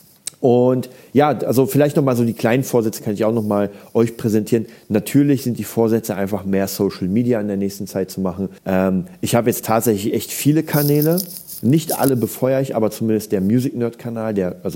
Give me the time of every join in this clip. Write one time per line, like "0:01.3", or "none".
0:08.6